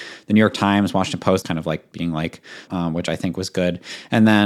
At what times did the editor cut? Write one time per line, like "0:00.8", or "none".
0:01.4
0:02.7